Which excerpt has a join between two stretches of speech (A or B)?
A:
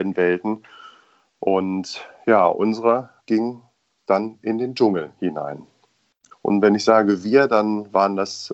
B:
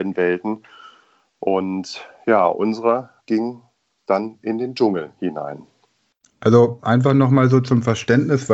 A